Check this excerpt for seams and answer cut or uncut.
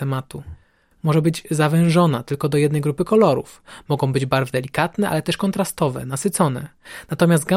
cut